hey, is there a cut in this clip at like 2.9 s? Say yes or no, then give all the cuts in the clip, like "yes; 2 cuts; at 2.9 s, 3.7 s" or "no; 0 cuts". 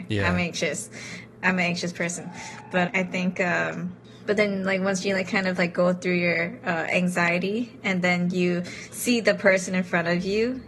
yes; 1 cut; at 2.9 s